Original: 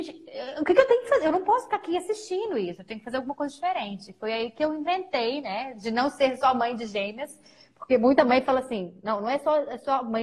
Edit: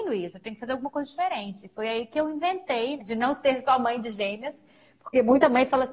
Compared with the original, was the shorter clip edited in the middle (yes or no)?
yes